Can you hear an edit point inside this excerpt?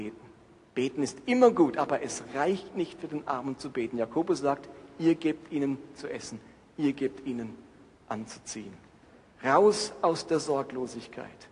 no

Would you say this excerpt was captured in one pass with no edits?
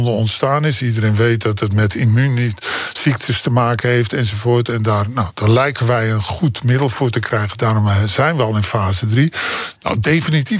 no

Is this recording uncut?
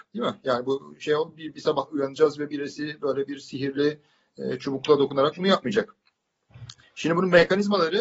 yes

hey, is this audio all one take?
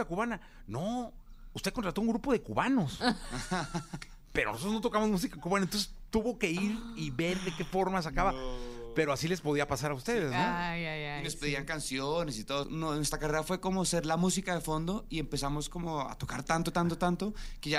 no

